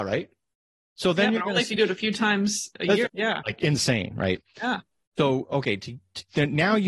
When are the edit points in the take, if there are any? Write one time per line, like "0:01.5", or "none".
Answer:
0:03.1